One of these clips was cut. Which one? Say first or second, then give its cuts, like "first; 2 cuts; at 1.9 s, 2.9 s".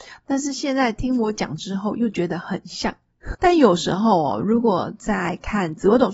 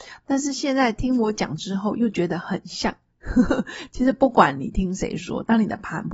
first; 1 cut; at 3.3 s